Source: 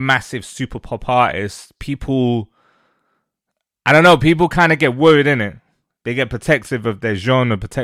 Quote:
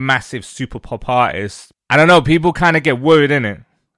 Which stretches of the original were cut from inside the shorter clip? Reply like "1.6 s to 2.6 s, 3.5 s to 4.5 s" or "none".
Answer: 1.7 s to 3.7 s